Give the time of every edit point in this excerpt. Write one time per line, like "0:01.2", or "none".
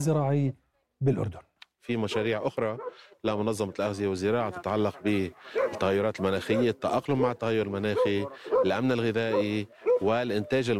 none